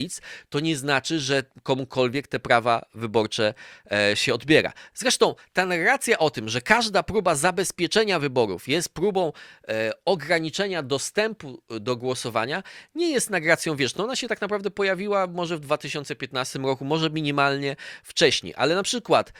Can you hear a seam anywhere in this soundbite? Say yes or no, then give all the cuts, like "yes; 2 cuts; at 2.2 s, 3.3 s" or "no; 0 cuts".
no; 0 cuts